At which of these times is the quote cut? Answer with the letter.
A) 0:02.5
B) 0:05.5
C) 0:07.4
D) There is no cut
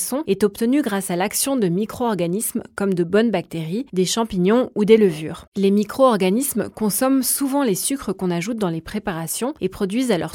B